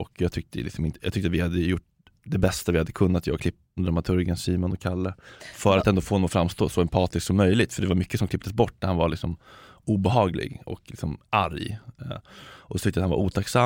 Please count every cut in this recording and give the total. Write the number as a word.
one